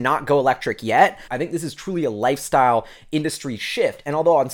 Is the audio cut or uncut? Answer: cut